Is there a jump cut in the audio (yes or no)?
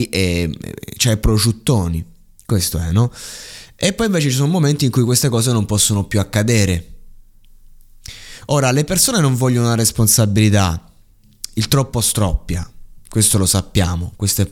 no